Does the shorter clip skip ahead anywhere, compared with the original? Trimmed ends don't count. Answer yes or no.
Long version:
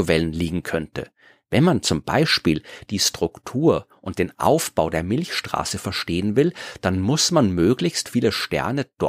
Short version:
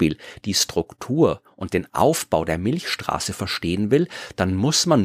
no